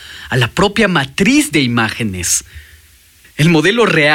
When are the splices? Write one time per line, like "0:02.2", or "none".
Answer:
0:03.2